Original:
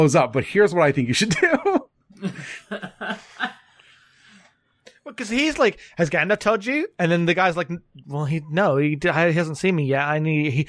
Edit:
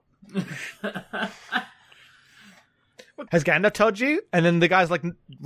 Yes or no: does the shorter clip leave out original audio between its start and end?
yes